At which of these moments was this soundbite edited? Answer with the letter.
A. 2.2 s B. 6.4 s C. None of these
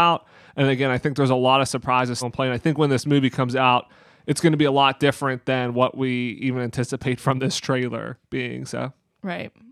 A